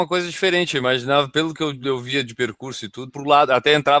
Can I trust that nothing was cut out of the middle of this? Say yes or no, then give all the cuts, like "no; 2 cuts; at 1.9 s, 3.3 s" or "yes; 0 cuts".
no; 1 cut; at 3.1 s